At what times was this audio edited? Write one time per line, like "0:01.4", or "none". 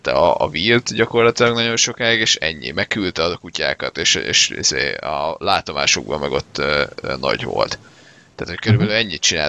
none